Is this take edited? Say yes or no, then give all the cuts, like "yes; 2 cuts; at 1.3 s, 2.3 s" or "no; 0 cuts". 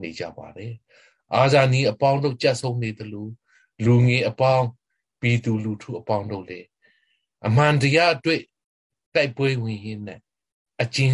no; 0 cuts